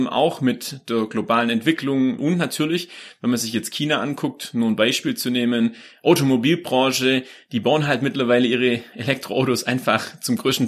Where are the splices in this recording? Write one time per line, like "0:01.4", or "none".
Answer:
0:02.2